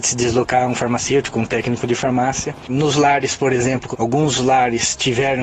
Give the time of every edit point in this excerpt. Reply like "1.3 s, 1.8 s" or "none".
2.7 s, 3.9 s